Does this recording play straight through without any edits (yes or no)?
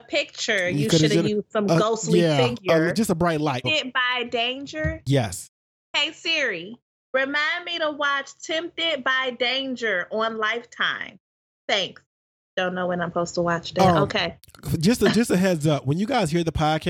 no